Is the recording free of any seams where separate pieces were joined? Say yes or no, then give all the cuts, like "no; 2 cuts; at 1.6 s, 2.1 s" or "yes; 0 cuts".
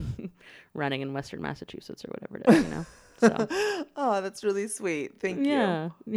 yes; 0 cuts